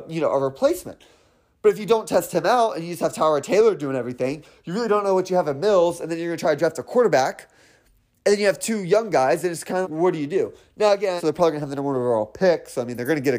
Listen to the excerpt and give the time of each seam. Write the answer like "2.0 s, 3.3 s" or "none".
9.8 s, 11.2 s

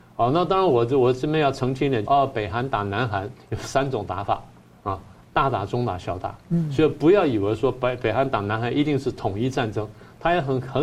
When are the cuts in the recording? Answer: 2.1 s, 3.3 s

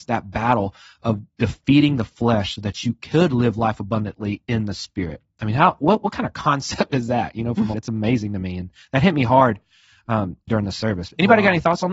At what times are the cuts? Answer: 7.7 s, 10.5 s

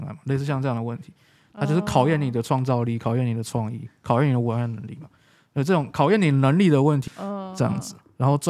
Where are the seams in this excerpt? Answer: 7.1 s

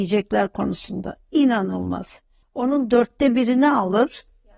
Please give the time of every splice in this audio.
2.4 s

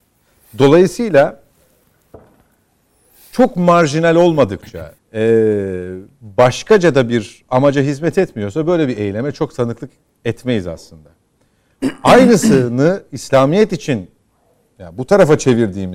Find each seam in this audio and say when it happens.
5.0 s

